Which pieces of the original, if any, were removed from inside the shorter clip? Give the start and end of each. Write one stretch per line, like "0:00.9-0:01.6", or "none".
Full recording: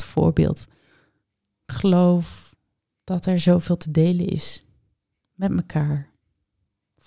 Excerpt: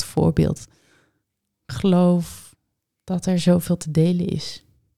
none